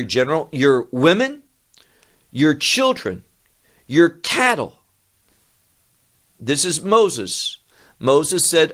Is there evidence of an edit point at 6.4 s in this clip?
yes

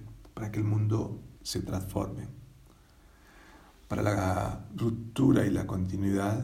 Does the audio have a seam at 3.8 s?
no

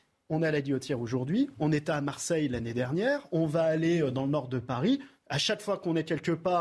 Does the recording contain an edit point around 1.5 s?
no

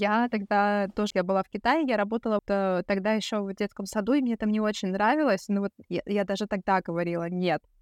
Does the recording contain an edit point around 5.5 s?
no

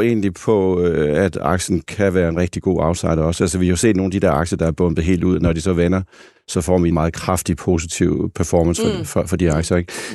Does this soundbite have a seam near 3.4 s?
no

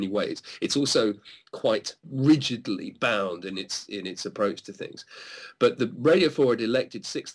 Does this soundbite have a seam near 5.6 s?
no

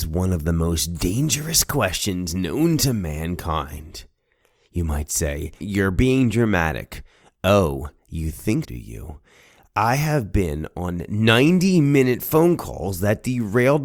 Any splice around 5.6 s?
yes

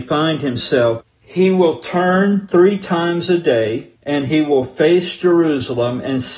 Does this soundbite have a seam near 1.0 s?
yes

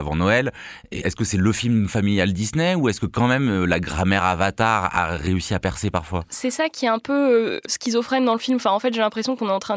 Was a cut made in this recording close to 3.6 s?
no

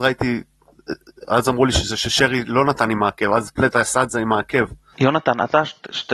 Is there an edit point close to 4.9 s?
yes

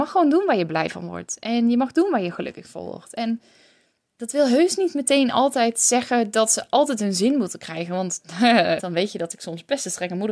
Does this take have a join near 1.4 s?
no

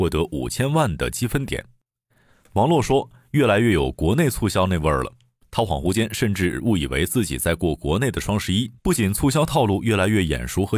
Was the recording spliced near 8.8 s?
yes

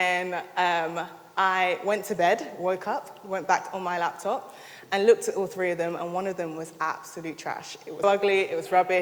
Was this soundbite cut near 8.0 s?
yes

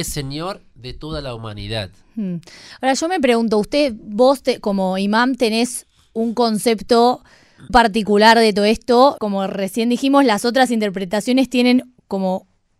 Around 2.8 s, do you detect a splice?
no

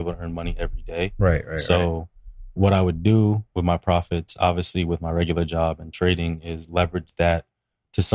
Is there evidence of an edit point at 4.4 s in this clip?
no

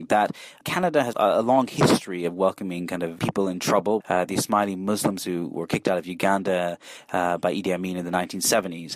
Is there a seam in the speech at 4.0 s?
yes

